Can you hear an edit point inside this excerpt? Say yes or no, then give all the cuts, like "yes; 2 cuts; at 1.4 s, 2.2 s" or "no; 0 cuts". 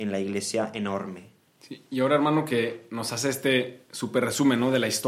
no; 0 cuts